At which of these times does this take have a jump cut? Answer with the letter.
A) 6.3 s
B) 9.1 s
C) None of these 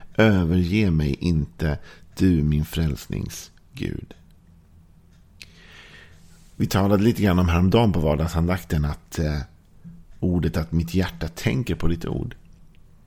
C